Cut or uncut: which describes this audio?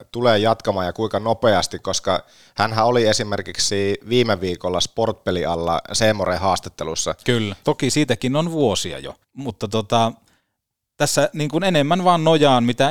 cut